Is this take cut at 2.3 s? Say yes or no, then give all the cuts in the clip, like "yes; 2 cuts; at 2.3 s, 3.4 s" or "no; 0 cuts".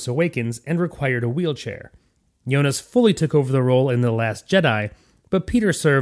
yes; 1 cut; at 2.3 s